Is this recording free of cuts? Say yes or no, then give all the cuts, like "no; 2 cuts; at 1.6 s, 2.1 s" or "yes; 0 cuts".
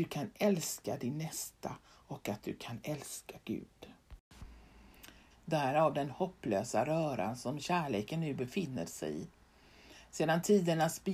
no; 1 cut; at 5.3 s